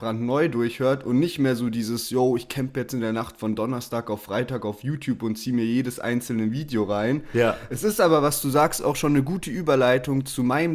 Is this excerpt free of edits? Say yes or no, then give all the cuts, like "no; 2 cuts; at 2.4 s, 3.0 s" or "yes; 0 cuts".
yes; 0 cuts